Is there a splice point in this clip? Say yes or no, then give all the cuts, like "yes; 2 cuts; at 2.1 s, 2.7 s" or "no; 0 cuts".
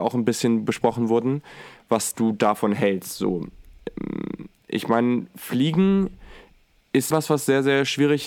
yes; 1 cut; at 7.1 s